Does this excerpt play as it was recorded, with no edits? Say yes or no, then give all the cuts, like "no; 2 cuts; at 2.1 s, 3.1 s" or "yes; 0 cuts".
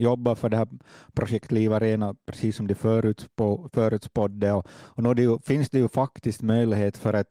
yes; 0 cuts